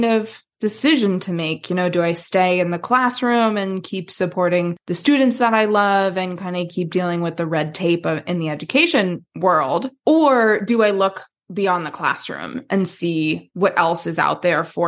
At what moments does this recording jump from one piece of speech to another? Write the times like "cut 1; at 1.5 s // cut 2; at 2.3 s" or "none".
none